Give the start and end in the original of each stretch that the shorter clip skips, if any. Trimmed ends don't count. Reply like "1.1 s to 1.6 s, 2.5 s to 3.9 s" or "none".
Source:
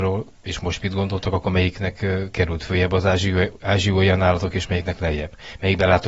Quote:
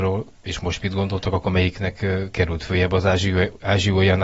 none